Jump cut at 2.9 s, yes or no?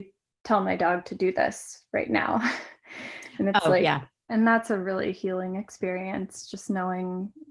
no